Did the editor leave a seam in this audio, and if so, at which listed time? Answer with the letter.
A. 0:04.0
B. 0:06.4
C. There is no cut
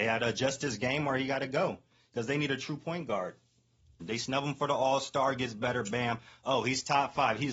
A